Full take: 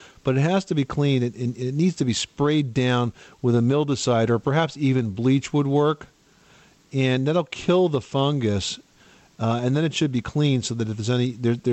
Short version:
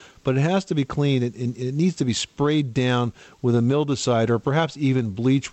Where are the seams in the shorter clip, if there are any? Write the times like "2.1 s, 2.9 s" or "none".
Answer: none

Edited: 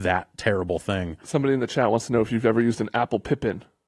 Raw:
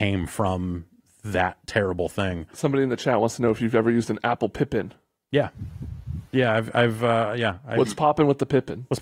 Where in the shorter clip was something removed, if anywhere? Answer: none

